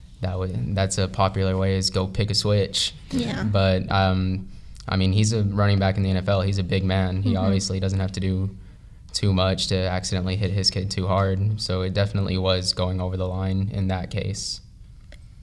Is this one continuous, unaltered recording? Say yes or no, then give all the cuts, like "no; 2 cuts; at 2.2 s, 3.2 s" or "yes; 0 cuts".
yes; 0 cuts